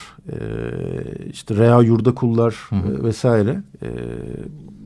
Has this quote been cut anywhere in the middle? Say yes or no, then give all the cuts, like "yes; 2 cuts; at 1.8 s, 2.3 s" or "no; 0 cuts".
no; 0 cuts